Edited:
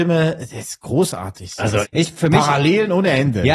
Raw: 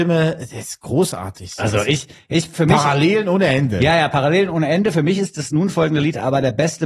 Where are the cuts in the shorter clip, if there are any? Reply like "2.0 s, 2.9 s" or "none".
1.8 s